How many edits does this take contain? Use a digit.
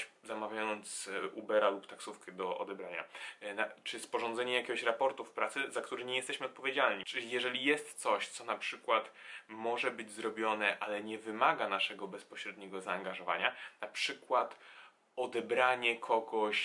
1